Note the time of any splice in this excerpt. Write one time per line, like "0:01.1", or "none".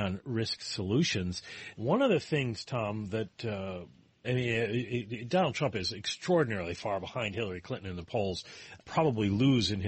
0:01.7
0:04.2
0:08.8

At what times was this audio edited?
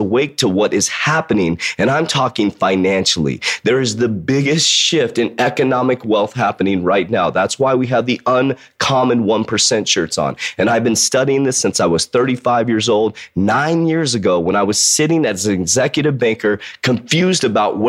none

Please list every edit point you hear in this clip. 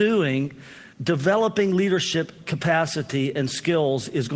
0:00.9

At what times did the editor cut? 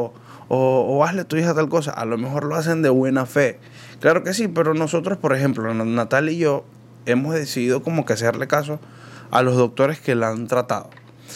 none

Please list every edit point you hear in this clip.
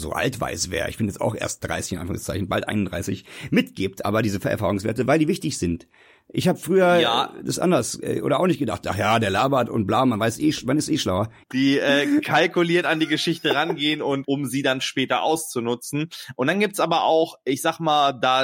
0:11.4
0:14.2

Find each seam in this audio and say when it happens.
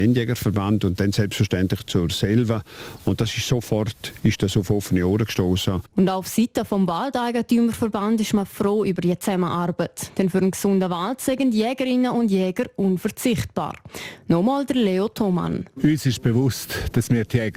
none

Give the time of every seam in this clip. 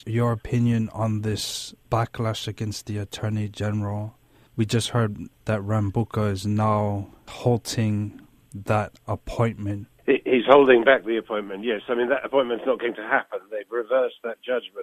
none

